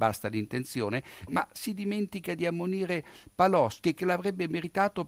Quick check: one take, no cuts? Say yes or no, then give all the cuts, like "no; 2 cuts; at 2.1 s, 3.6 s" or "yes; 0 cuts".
no; 1 cut; at 1.3 s